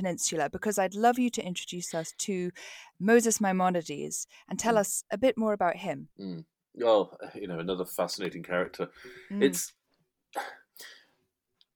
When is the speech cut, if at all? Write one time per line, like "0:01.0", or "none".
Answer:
0:06.1